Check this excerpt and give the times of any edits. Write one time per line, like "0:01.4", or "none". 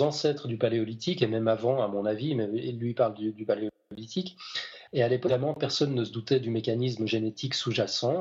0:04.9